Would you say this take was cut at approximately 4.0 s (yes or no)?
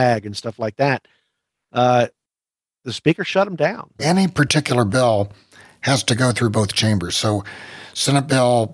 yes